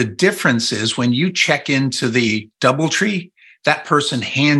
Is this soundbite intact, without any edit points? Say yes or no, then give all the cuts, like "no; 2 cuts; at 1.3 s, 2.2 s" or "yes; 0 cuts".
yes; 0 cuts